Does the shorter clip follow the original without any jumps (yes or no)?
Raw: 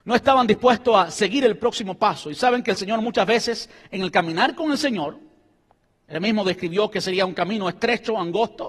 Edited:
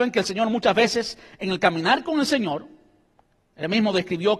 yes